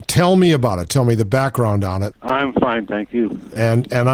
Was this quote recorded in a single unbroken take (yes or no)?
no